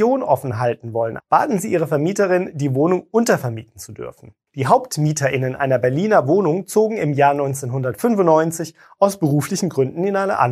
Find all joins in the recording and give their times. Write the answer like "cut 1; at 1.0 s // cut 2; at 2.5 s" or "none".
cut 1; at 1.2 s // cut 2; at 4.5 s